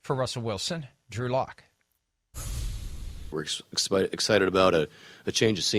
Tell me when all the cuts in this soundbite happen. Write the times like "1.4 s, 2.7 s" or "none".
3.3 s